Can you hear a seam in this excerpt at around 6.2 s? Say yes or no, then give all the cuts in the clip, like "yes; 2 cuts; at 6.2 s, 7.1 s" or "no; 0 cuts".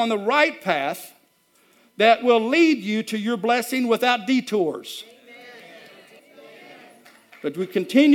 yes; 1 cut; at 6.2 s